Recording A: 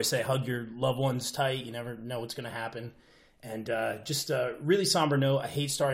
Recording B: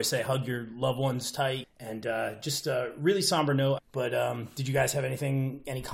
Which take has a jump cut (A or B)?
B